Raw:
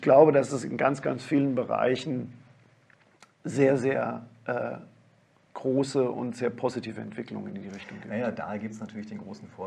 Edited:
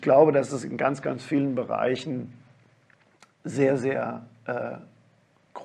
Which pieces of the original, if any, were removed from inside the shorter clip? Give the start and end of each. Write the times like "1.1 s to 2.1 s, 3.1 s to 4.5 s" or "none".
none

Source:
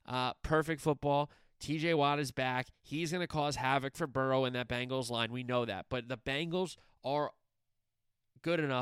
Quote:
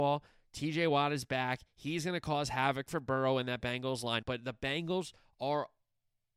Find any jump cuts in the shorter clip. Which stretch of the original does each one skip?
5.3 s to 5.9 s

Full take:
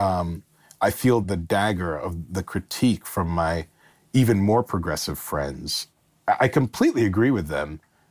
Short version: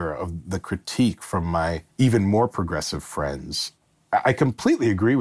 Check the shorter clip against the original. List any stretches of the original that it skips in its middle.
3.7 s to 4.1 s

